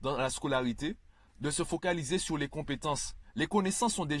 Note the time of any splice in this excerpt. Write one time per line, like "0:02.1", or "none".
none